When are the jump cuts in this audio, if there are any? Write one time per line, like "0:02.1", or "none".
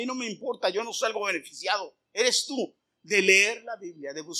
none